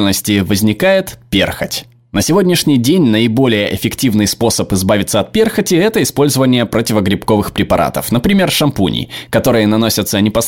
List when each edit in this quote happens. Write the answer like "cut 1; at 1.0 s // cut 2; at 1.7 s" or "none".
none